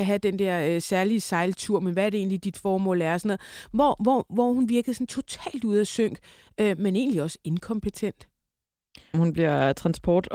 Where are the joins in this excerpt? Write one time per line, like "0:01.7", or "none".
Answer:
0:09.1